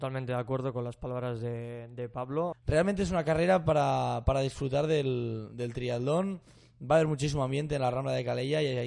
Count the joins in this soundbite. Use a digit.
1